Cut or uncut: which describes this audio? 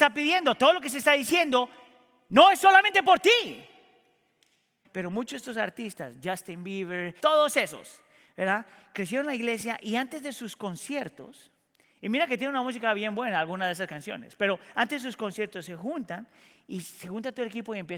cut